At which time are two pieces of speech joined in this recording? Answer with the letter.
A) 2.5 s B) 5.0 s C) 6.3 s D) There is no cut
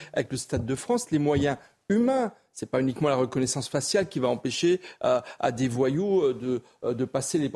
D